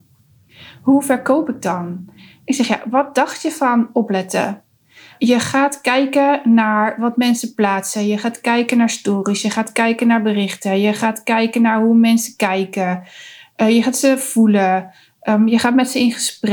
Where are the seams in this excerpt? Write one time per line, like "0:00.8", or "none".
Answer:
none

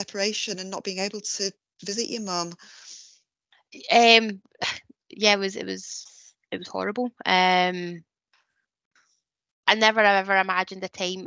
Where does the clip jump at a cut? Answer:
none

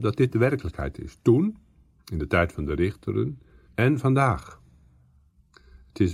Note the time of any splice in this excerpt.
0:03.7

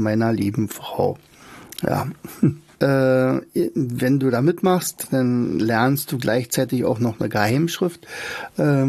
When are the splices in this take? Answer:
0:02.7

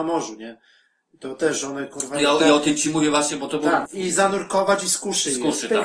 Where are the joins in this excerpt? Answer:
0:03.9

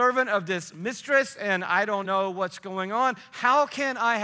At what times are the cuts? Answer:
0:02.0

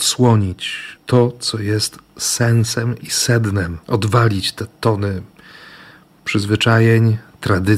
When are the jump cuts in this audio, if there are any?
0:01.0
0:03.8

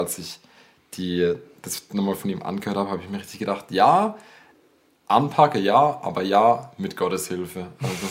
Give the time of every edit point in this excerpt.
none

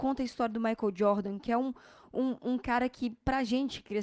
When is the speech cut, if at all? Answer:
none

